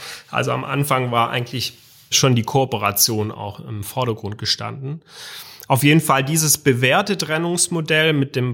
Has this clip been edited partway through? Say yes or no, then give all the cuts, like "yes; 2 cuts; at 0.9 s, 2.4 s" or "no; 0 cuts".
no; 0 cuts